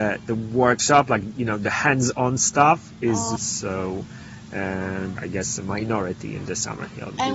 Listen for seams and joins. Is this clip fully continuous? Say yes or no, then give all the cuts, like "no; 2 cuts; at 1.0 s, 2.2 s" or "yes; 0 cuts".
no; 2 cuts; at 3.4 s, 5.2 s